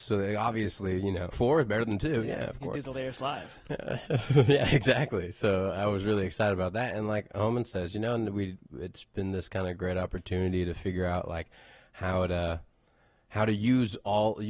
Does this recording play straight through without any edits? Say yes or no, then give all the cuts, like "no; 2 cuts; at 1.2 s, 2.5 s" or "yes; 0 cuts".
no; 1 cut; at 1.3 s